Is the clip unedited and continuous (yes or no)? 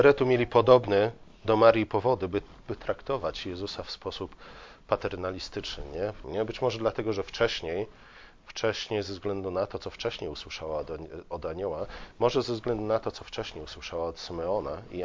no